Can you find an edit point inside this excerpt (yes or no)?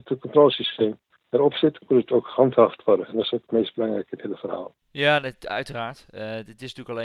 yes